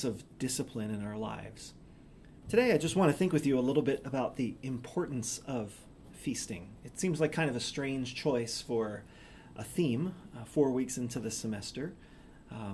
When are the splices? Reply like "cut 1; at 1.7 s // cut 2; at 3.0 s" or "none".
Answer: cut 1; at 2.4 s